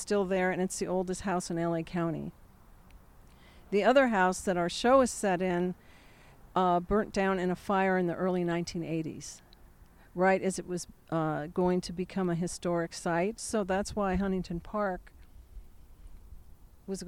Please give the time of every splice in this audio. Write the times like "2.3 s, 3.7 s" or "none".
6.5 s, 13.4 s